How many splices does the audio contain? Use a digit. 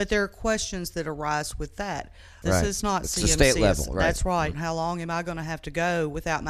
2